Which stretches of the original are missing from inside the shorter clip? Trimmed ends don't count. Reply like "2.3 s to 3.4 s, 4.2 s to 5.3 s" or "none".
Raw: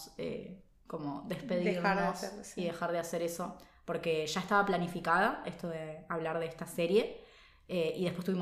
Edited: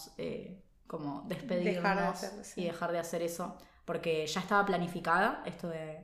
none